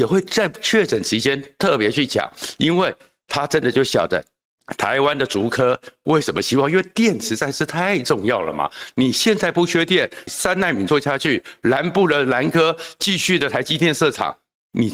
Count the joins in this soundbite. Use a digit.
1